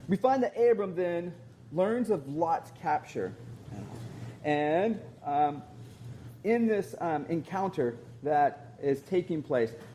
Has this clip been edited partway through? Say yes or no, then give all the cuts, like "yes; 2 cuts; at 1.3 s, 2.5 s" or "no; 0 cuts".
no; 0 cuts